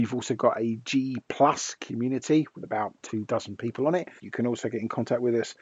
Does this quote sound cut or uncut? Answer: cut